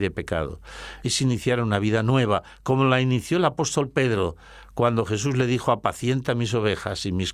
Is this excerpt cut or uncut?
cut